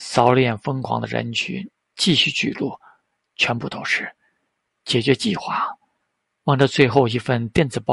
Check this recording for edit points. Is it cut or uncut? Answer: uncut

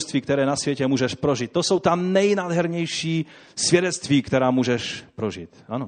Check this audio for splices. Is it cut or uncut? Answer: uncut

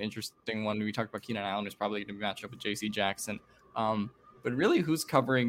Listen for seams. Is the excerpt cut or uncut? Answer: uncut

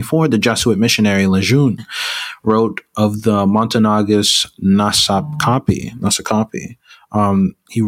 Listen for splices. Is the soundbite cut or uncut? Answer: uncut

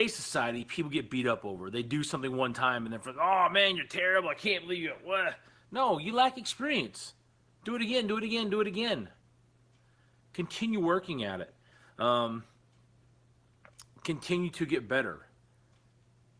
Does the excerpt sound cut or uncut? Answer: uncut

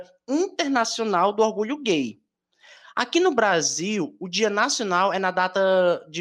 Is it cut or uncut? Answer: uncut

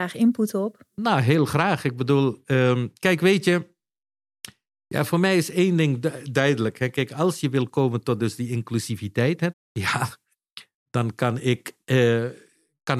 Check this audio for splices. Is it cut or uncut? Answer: cut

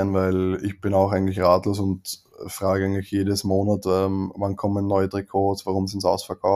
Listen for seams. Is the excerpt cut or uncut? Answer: uncut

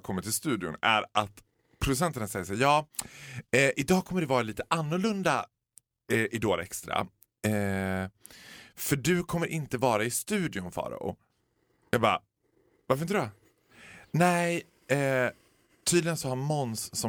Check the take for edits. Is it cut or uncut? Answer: uncut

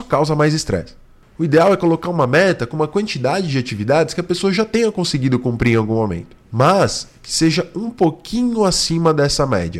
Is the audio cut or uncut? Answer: uncut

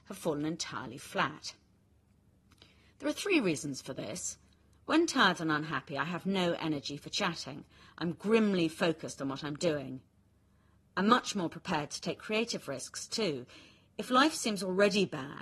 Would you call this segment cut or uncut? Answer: uncut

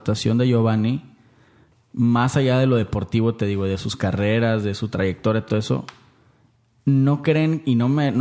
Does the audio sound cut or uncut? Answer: uncut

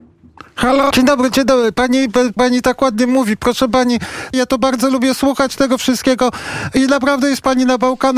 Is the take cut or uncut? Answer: cut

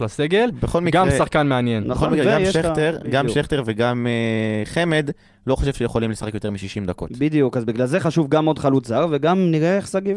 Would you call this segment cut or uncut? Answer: uncut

